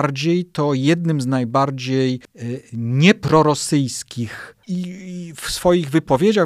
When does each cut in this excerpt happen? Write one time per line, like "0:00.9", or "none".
0:04.6